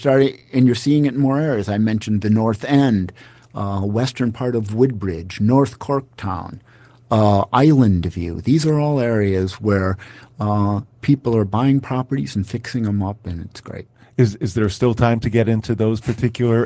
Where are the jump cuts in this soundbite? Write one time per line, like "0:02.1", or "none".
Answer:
none